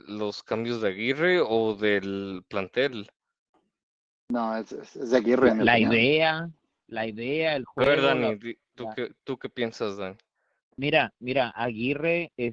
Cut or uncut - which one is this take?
uncut